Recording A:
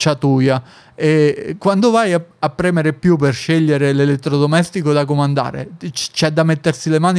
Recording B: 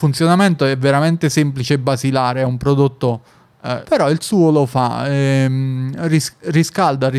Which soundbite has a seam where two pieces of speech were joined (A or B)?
B